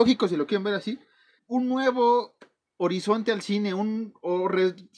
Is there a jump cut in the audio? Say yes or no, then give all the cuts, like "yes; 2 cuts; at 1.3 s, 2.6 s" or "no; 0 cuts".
yes; 1 cut; at 1.4 s